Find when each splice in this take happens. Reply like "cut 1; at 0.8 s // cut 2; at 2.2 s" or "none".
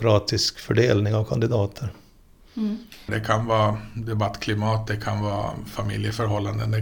cut 1; at 3.1 s